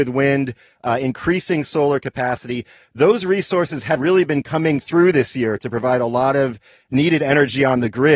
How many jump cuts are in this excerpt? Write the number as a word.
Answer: one